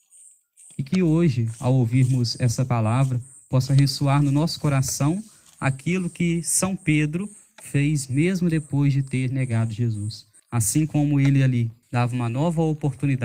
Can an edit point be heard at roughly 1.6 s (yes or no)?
no